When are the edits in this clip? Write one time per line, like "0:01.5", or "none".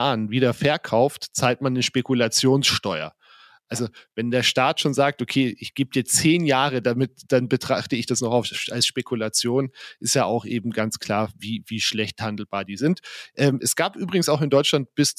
none